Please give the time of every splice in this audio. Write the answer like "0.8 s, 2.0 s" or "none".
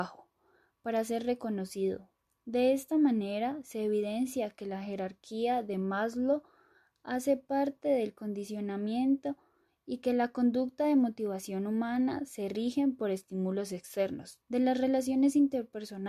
14.4 s